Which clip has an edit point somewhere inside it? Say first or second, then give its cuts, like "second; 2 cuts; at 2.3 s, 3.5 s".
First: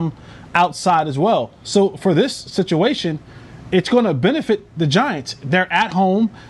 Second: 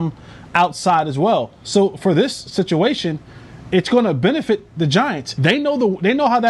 second; 1 cut; at 5.4 s